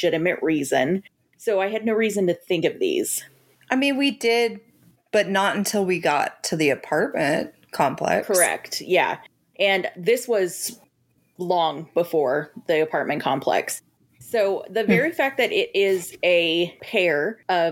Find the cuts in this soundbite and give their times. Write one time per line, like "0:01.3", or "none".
none

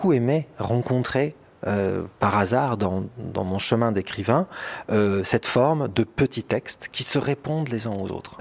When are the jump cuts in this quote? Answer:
none

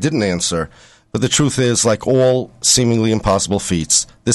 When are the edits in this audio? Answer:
0:01.0

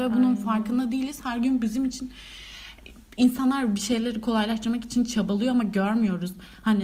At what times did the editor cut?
none

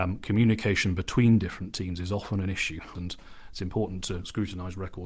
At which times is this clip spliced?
0:03.0

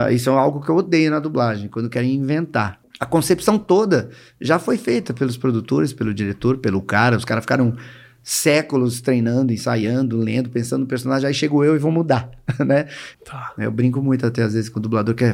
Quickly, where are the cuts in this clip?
0:02.8
0:13.1

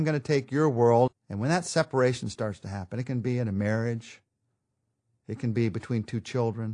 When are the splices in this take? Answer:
0:01.1

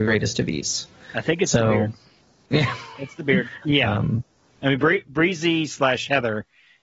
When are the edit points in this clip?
0:03.6

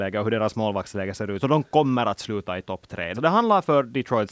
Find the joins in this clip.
0:01.4
0:03.1

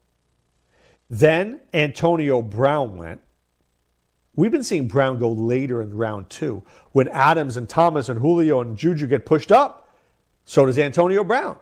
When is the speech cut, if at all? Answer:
0:06.9

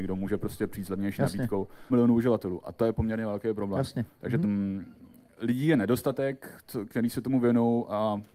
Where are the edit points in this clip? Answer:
0:01.9
0:04.4

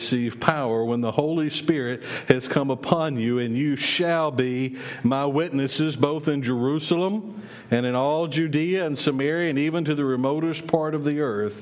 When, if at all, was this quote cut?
none

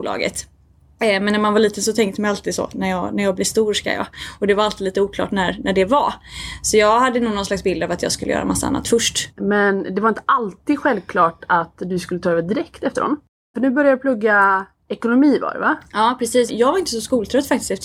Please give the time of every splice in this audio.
0:09.3
0:13.5
0:16.5

